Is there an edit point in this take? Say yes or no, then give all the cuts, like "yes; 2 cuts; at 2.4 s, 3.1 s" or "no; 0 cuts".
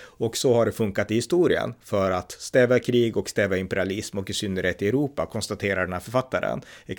no; 0 cuts